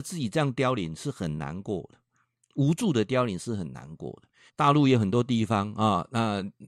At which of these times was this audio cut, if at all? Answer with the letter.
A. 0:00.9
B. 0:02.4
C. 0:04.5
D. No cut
C